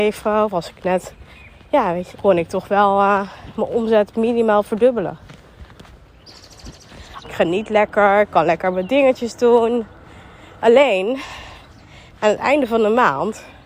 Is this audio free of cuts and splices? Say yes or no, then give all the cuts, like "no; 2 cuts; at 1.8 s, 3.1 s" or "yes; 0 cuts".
no; 2 cuts; at 2.1 s, 7.2 s